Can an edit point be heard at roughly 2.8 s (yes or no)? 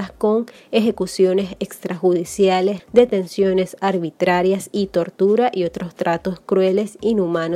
yes